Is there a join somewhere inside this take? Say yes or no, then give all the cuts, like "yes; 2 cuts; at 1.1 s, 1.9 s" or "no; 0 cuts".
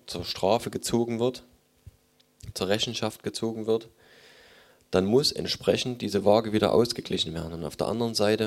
yes; 1 cut; at 2.5 s